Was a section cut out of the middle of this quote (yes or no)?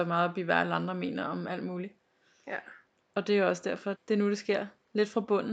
yes